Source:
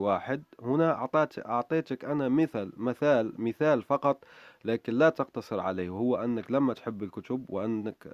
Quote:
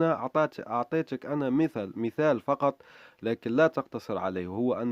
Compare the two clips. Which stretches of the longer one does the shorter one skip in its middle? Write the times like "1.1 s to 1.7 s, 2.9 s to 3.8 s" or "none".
2.7 s to 3.4 s